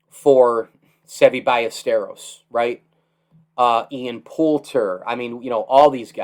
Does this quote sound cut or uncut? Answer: uncut